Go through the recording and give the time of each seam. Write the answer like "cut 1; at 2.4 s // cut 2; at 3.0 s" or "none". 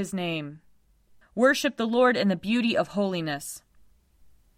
cut 1; at 1.2 s